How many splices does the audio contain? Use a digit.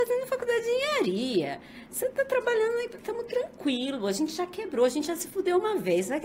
0